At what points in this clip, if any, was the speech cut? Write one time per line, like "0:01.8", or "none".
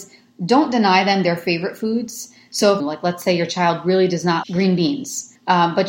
0:02.8
0:04.4